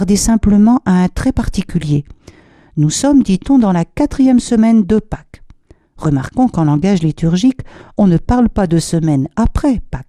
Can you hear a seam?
no; 0 cuts

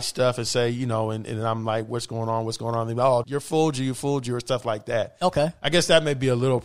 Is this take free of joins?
no; 1 cut; at 3.2 s

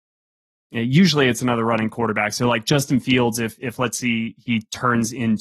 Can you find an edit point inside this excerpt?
no; 0 cuts

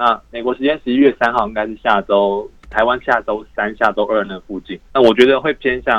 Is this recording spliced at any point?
yes; 1 cut; at 4.9 s

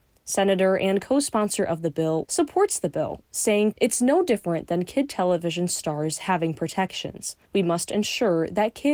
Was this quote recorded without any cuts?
no; 3 cuts; at 2.2 s, 3.7 s, 7.4 s

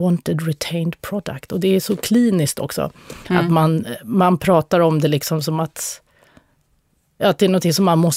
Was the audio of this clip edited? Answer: no; 0 cuts

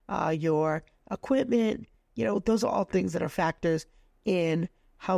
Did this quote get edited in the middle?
no; 0 cuts

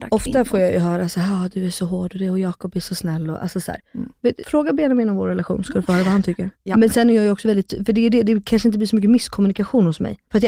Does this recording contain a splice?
yes; 2 cuts; at 4.4 s, 6.5 s

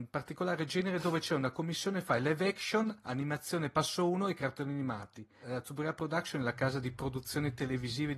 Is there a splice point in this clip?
yes; 1 cut; at 5.4 s

